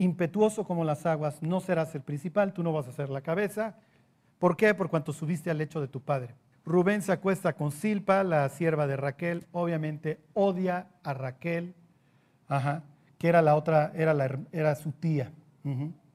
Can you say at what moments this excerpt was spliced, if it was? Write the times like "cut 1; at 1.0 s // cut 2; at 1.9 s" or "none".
cut 1; at 6.5 s